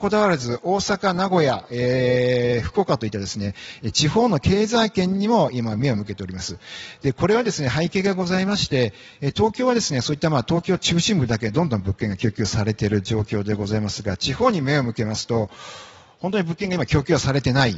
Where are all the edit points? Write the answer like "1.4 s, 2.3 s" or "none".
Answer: none